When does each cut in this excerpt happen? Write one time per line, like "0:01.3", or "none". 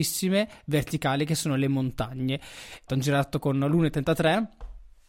0:02.9